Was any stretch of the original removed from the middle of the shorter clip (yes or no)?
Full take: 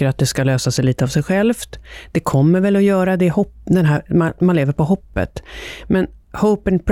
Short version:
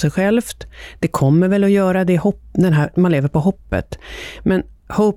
yes